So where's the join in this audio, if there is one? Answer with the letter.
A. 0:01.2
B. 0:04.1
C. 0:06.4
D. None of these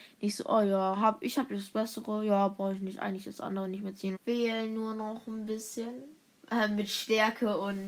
B